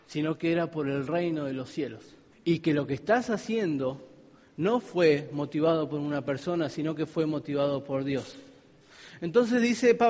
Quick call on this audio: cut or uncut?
cut